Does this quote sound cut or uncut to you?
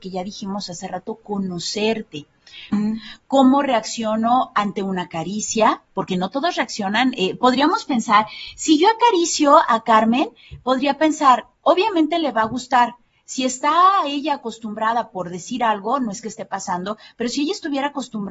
cut